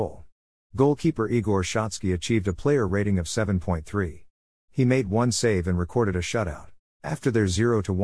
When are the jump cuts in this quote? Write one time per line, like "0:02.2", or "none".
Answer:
0:06.9